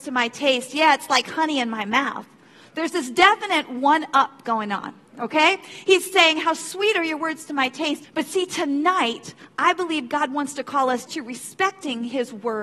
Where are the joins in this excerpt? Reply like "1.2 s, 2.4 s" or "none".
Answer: 8.0 s, 11.1 s